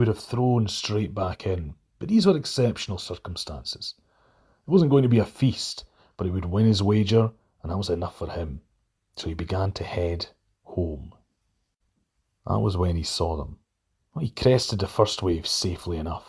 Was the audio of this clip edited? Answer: yes; 1 cut; at 14.1 s

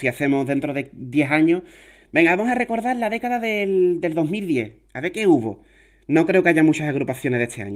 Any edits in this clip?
no; 0 cuts

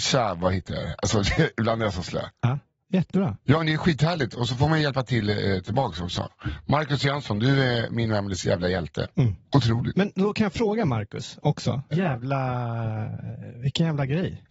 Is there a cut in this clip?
yes; 2 cuts; at 3.4 s, 11.9 s

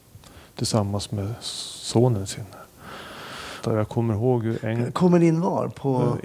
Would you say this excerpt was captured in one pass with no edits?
no; 1 cut; at 3.6 s

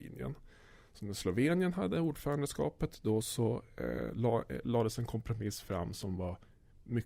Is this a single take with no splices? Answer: yes; 0 cuts

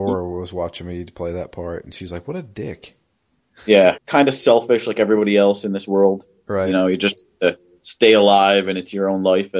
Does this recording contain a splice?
yes; 1 cut; at 4.0 s

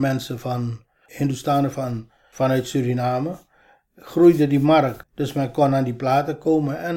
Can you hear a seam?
yes; 1 cut; at 5.0 s

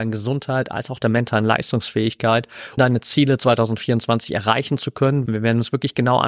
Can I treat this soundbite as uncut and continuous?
no; 2 cuts; at 2.8 s, 5.3 s

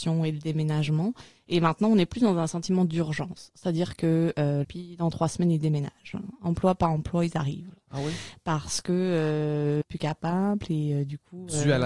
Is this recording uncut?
no; 2 cuts; at 4.6 s, 9.8 s

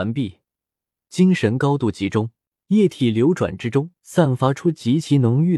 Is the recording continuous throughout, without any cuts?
no; 3 cuts; at 0.9 s, 2.5 s, 4.0 s

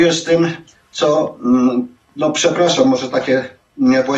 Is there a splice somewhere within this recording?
no; 0 cuts

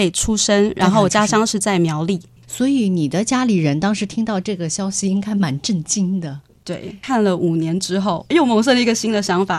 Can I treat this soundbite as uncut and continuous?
yes; 0 cuts

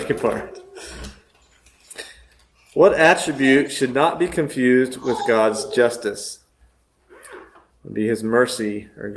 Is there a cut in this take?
no; 0 cuts

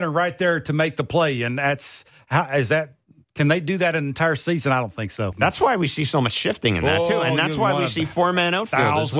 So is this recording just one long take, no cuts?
no; 1 cut; at 5.3 s

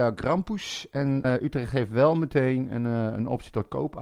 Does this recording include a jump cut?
yes; 1 cut; at 1.2 s

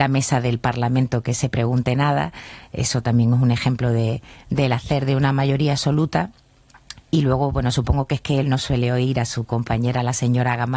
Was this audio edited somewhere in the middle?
no; 0 cuts

